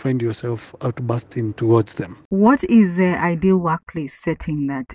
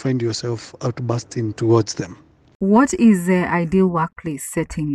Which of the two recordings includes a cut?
first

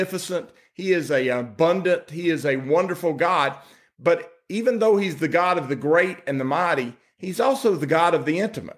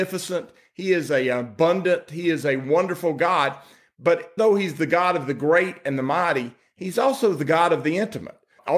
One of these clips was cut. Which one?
second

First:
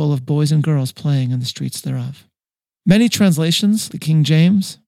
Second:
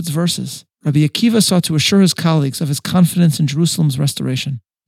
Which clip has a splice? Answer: first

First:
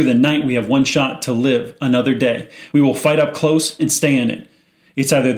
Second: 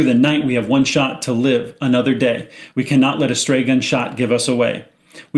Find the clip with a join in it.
first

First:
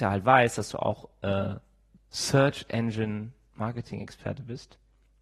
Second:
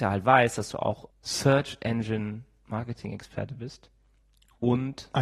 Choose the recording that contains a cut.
second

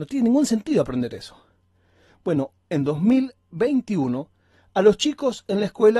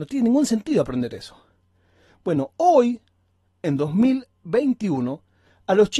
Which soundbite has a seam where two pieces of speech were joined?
first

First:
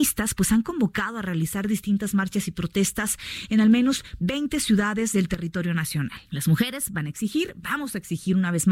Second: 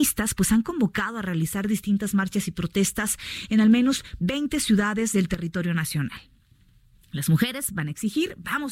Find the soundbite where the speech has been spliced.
first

